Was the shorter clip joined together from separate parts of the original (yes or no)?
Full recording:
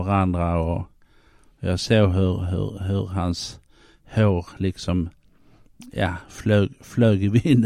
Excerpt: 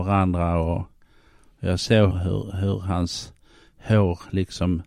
yes